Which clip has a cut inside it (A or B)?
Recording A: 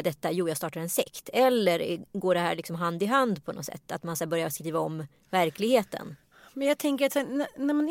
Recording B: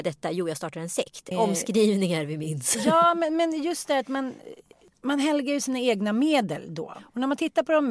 B